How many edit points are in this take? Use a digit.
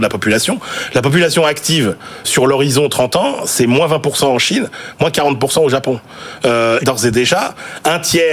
2